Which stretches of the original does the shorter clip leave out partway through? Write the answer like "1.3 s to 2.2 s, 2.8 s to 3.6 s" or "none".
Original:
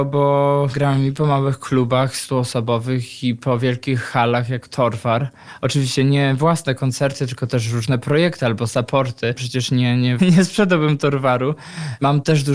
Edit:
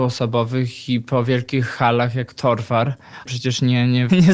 5.6 s to 9.4 s